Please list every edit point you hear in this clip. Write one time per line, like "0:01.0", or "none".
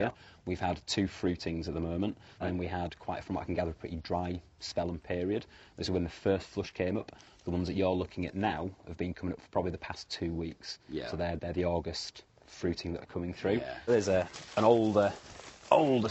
0:02.4
0:13.9